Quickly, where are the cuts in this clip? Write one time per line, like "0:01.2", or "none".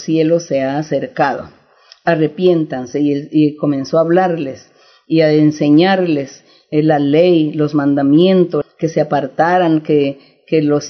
0:08.6